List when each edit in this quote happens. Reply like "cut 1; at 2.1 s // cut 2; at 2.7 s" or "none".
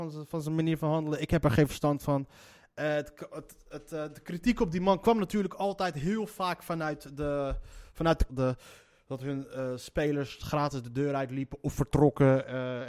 cut 1; at 8.3 s

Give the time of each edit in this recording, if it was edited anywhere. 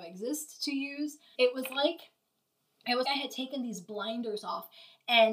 cut 1; at 1.3 s // cut 2; at 3.0 s

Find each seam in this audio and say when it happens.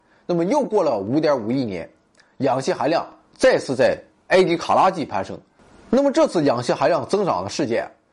none

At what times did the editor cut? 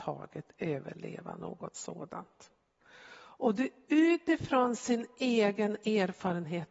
none

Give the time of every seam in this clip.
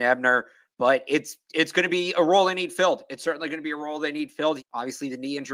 cut 1; at 4.6 s

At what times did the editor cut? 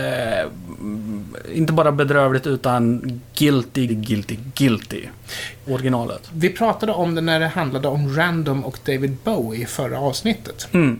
cut 1; at 3.9 s // cut 2; at 5.7 s

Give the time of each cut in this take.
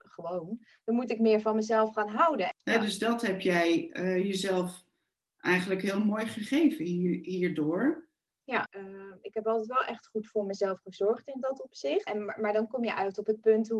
cut 1; at 2.5 s // cut 2; at 8.7 s // cut 3; at 12.1 s

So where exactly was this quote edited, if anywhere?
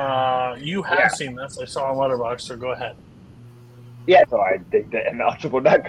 cut 1; at 4.3 s

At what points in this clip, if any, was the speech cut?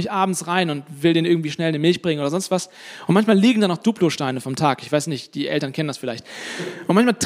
none

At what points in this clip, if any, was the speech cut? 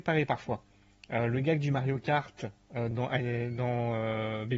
none

